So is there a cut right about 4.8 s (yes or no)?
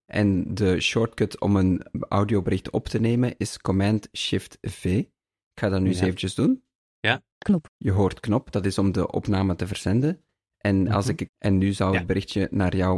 no